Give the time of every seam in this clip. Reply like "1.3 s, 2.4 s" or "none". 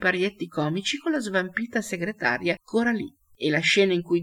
none